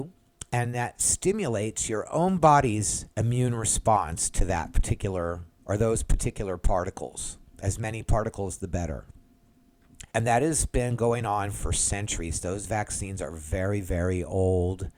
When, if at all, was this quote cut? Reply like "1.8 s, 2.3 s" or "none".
3.1 s, 10.1 s